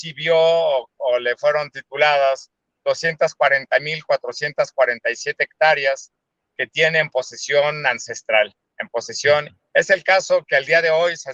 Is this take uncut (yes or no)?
no